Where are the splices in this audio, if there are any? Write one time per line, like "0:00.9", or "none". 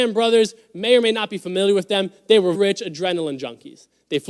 0:02.5